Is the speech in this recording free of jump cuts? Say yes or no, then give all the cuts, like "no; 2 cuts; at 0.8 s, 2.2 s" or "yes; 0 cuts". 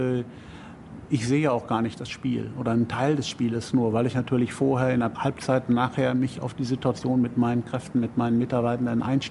yes; 0 cuts